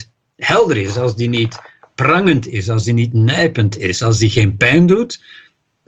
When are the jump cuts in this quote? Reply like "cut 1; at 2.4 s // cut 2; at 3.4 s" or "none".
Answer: none